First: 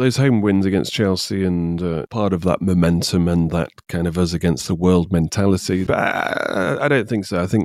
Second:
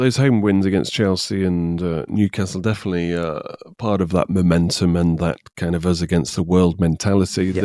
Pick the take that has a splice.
first; 2 cuts; at 2.1 s, 5.9 s

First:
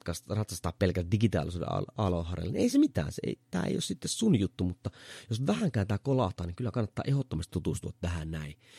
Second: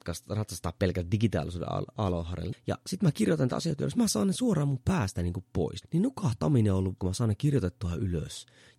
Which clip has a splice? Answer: second; 3 cuts; at 2.5 s, 5.8 s, 7.0 s

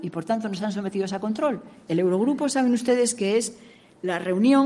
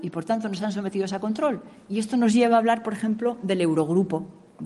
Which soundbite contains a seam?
first; 1 cut; at 1.9 s

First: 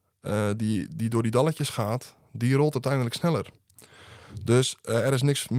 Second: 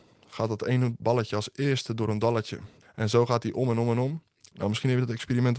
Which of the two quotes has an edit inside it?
second; 3 cuts; at 1.0 s, 2.8 s, 4.5 s

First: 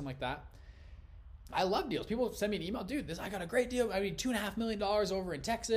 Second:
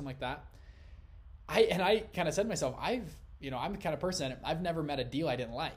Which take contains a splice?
first; 1 cut; at 1.4 s

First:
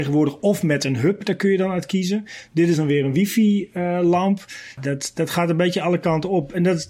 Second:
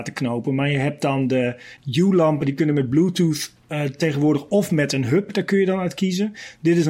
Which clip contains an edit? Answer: first; 1 cut; at 4.8 s

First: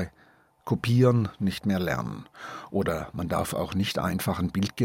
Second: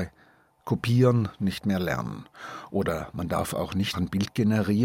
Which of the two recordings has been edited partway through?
second; 1 cut; at 3.9 s

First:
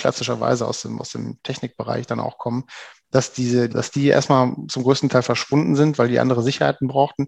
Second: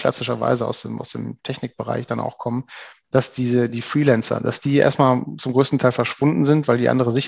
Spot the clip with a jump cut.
first; 1 cut; at 3.7 s

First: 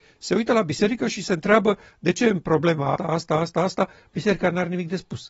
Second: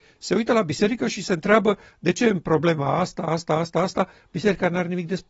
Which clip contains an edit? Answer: first; 1 cut; at 3.0 s

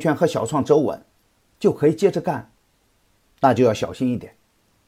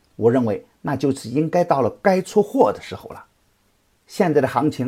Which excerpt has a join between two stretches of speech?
first; 1 cut; at 3.2 s

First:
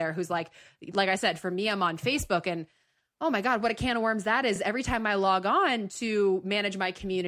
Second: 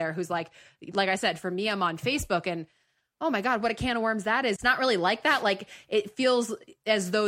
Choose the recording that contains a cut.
second; 1 cut; at 4.6 s

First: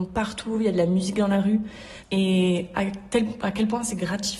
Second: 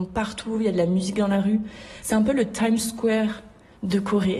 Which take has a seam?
first; 1 cut; at 2.0 s

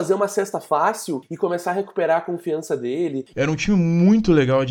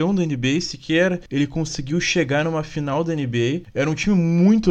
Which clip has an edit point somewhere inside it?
first; 1 cut; at 3.3 s

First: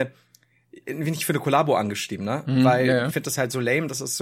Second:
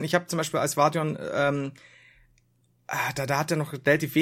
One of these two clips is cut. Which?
first; 1 cut; at 3.1 s

